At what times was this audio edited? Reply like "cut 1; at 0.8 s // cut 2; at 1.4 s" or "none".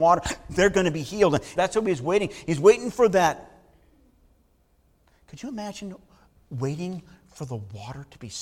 cut 1; at 1.6 s